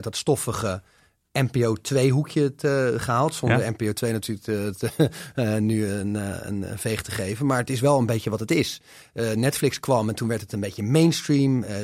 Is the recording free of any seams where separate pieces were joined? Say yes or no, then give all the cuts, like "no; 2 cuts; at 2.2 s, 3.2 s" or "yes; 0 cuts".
yes; 0 cuts